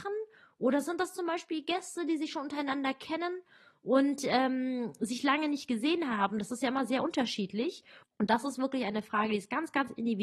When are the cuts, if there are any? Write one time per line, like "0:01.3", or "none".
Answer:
0:08.0